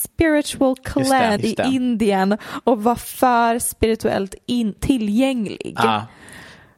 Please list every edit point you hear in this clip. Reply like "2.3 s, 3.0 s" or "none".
1.4 s